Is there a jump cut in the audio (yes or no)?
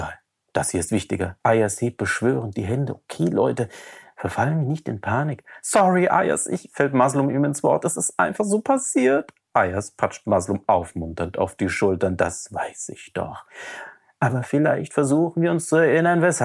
yes